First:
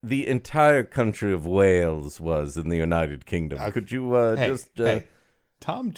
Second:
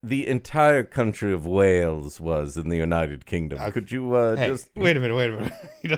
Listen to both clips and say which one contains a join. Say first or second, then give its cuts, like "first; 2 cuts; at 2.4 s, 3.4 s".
second; 1 cut; at 4.8 s